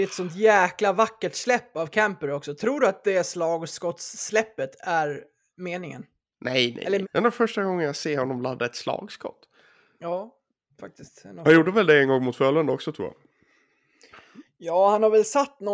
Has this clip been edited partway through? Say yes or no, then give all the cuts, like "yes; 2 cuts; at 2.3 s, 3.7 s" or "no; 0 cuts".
yes; 1 cut; at 7.0 s